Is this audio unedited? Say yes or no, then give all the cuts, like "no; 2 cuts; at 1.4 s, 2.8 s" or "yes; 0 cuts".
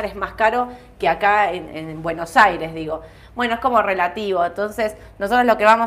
no; 1 cut; at 1.7 s